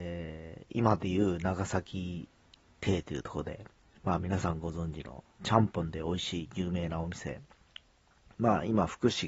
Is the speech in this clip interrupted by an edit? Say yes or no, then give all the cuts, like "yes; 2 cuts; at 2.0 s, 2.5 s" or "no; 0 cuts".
no; 0 cuts